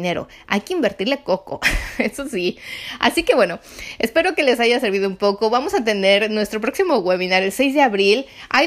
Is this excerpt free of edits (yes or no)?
yes